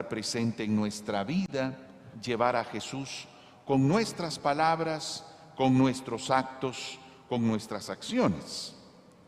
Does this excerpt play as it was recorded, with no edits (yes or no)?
yes